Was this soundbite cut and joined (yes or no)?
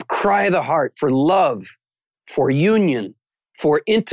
no